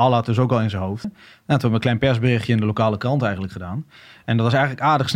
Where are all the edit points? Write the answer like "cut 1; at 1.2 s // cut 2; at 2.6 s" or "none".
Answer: cut 1; at 1.0 s